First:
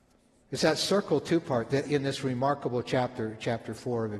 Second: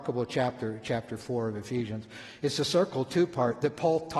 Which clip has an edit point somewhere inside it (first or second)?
first